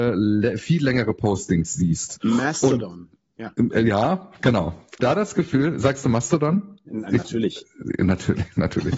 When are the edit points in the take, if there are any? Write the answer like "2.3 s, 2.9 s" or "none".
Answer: 5.0 s